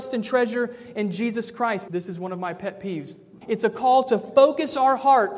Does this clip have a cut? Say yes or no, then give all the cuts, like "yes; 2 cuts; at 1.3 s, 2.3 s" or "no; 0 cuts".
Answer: yes; 2 cuts; at 1.9 s, 3.4 s